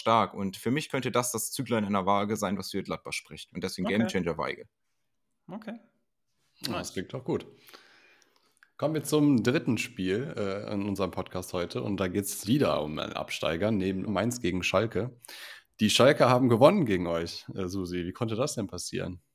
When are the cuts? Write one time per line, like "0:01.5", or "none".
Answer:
0:12.5
0:14.1